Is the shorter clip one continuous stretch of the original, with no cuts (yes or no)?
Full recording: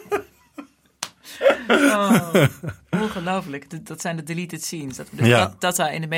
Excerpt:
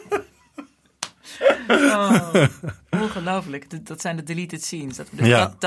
yes